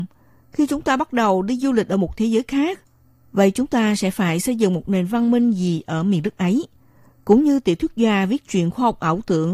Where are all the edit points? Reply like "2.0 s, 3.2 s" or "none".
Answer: none